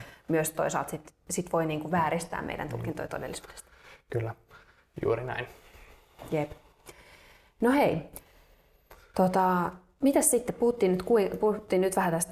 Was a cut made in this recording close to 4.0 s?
no; 0 cuts

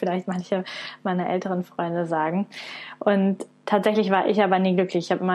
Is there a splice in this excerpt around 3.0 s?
no; 0 cuts

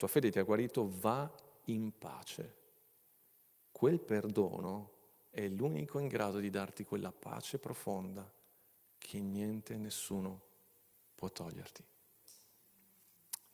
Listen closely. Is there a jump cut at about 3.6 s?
no; 0 cuts

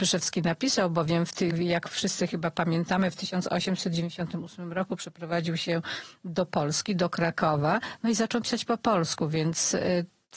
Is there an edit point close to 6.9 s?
no; 1 cut; at 1.5 s

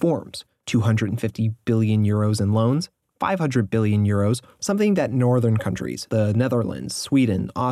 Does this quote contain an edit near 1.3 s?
no; 3 cuts; at 3.1 s, 4.6 s, 6.1 s

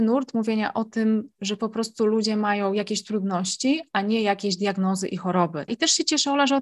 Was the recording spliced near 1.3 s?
no; 1 cut; at 5.7 s

